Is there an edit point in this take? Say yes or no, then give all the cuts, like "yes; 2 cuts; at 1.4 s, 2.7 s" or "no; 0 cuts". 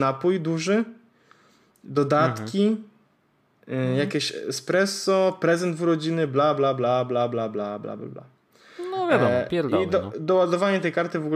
no; 0 cuts